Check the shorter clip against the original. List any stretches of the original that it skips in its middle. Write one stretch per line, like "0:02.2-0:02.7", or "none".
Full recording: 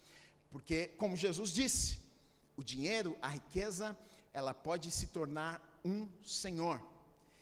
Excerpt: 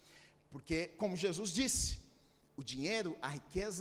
none

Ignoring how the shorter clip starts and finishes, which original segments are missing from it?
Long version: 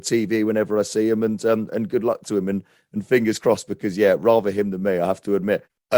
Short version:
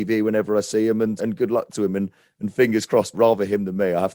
0:01.4-0:01.7
0:03.7-0:04.2

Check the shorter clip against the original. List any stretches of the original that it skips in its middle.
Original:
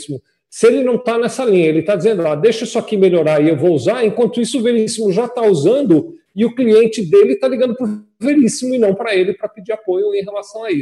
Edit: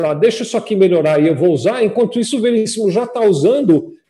none

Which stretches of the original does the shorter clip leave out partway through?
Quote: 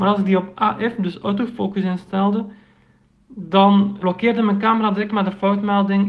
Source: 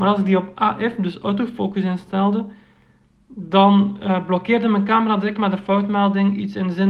0:04.0-0:04.3

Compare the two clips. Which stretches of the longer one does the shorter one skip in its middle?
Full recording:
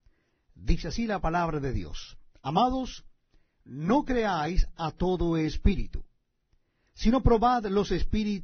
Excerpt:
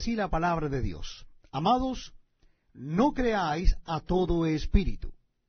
none

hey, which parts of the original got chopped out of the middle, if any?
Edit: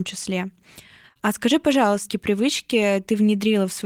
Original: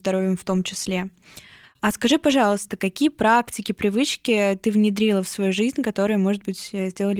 0:02.7-0:03.6

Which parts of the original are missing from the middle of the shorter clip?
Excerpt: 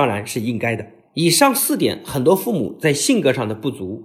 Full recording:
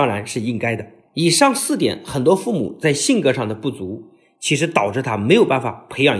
none

